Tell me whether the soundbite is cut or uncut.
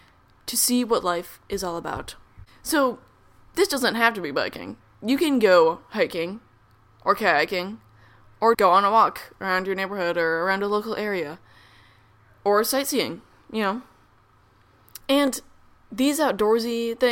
cut